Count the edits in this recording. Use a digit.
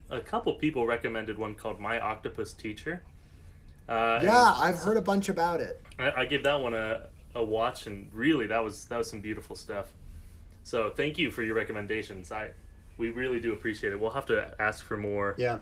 0